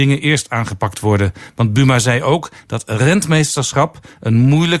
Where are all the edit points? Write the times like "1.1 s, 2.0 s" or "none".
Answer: none